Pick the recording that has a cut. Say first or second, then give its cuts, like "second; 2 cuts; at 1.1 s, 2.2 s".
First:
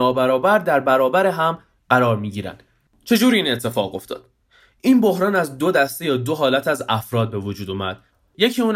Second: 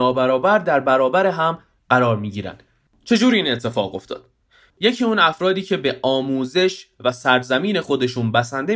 second; 1 cut; at 4.7 s